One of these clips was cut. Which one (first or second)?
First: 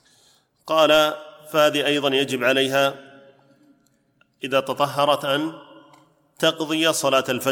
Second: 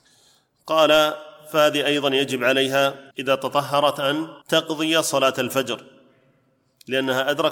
second